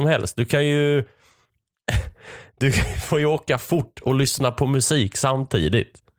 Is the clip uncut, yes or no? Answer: yes